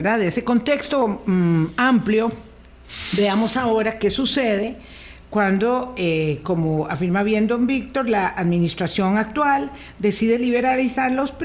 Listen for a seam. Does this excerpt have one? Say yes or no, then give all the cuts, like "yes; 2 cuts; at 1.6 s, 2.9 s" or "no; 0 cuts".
no; 0 cuts